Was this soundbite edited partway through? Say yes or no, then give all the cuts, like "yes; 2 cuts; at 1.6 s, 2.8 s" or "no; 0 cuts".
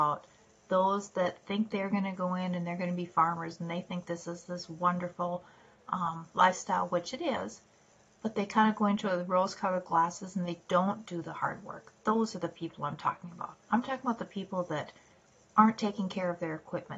no; 0 cuts